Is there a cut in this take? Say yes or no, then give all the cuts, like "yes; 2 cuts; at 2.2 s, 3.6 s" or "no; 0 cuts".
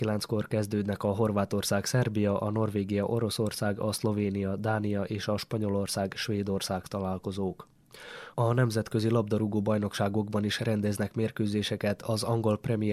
no; 0 cuts